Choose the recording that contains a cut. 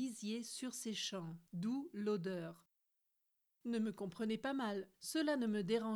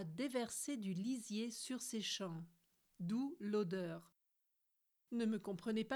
first; 2 cuts; at 1.5 s, 4.9 s

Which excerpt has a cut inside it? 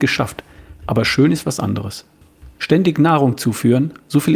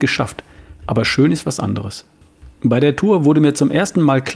first; 1 cut; at 2.6 s

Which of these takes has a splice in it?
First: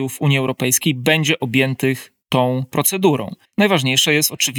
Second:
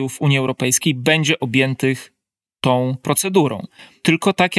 first; 2 cuts; at 2.2 s, 3.4 s

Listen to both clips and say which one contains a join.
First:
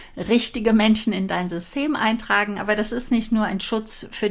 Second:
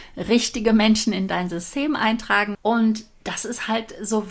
second; 1 cut; at 2.5 s

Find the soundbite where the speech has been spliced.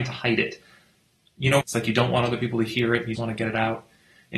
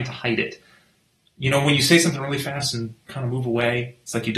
first; 2 cuts; at 1.6 s, 3.1 s

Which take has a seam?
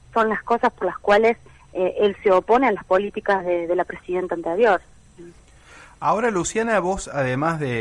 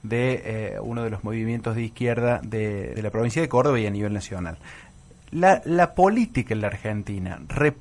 second; 1 cut; at 3.0 s

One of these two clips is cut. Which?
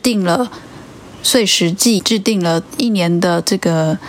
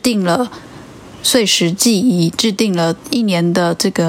first; 1 cut; at 2.0 s

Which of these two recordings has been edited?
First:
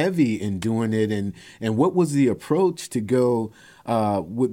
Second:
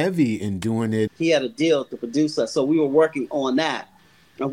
second; 1 cut; at 1.1 s

